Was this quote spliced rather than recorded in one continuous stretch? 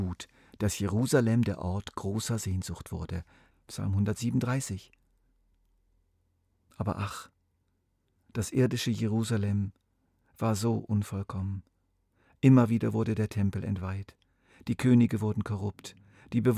yes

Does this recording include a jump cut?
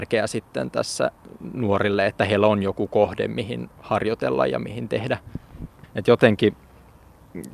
yes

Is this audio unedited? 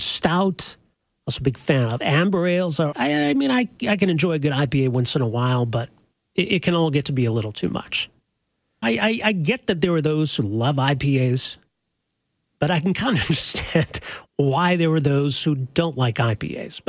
no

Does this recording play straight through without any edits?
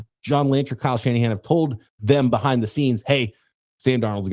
no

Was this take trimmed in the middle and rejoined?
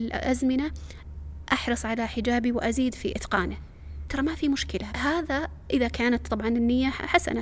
yes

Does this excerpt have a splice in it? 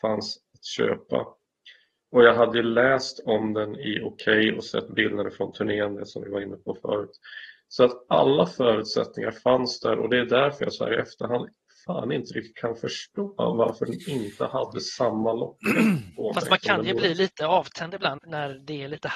yes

